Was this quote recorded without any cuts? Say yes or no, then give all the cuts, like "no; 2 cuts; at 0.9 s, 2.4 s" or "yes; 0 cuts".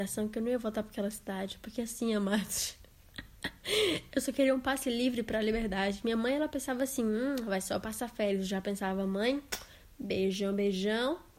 yes; 0 cuts